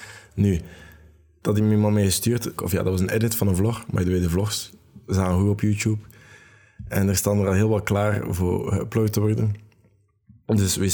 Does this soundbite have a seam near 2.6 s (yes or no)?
yes